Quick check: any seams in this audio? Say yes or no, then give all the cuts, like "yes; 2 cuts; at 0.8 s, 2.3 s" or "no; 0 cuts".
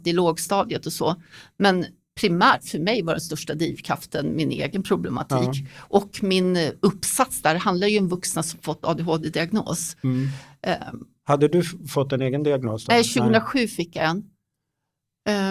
no; 0 cuts